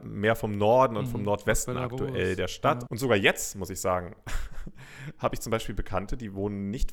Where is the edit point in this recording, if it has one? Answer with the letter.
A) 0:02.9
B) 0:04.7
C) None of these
A